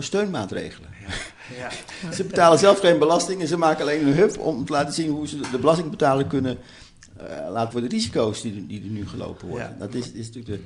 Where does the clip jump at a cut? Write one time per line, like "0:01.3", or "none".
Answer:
0:07.7